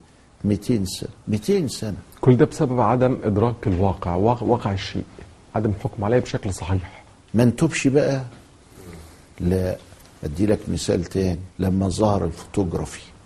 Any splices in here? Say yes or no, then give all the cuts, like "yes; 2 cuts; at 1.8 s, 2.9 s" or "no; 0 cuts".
yes; 2 cuts; at 1.2 s, 11.5 s